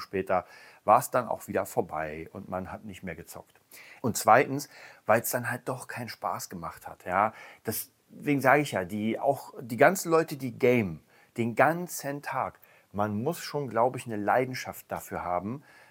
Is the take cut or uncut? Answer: cut